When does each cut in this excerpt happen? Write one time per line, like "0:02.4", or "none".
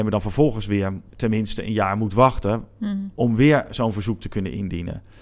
0:01.1